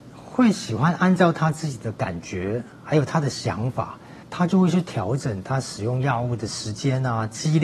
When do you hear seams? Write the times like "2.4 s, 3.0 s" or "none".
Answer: 4.2 s